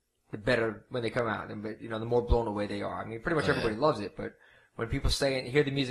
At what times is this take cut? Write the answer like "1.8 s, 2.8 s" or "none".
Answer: none